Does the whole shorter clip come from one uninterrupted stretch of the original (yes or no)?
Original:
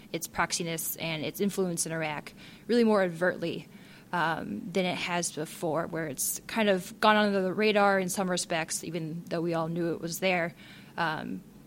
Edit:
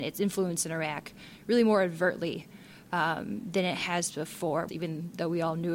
no